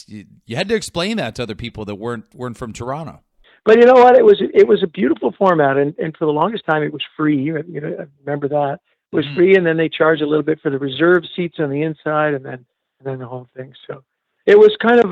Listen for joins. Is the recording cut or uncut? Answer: uncut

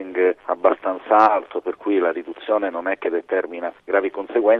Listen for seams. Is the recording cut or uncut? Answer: uncut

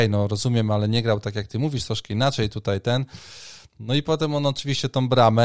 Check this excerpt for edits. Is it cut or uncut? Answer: uncut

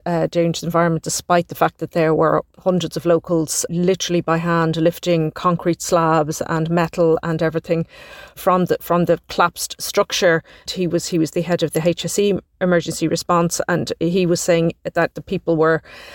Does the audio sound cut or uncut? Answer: cut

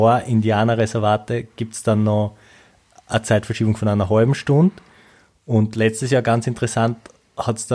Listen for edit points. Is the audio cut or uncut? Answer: uncut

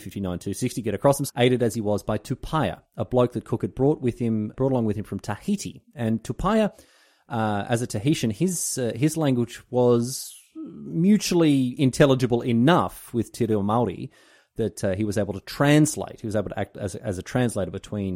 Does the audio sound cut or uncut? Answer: cut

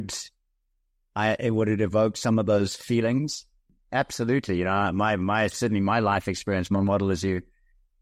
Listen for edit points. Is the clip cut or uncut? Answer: uncut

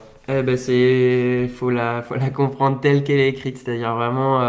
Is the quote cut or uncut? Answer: uncut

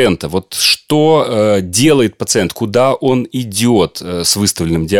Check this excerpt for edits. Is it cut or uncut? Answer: uncut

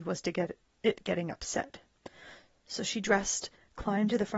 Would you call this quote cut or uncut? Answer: uncut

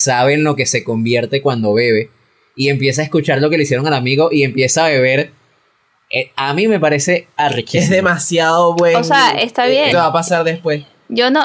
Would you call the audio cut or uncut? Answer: cut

